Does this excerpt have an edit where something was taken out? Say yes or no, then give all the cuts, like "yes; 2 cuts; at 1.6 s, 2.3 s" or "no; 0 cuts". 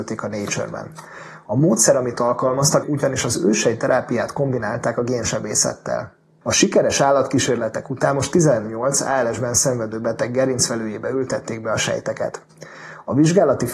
yes; 2 cuts; at 2.8 s, 6.4 s